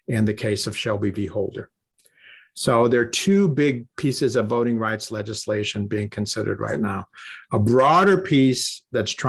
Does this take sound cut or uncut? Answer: uncut